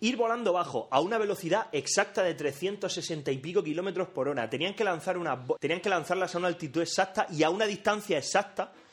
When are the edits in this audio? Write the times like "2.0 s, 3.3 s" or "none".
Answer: 5.6 s